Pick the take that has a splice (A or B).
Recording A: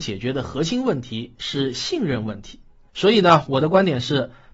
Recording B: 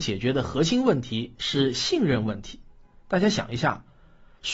A